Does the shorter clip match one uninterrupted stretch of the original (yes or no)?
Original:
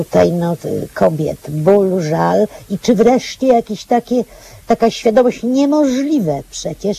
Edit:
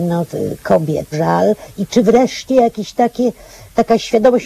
no